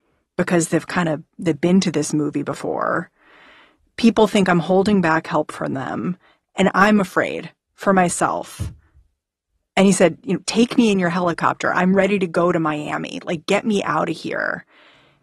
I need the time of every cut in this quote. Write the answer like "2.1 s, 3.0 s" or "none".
none